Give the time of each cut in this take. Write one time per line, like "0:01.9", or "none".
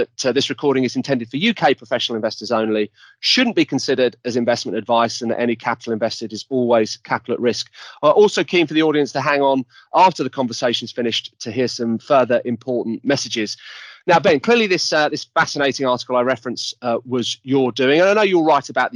none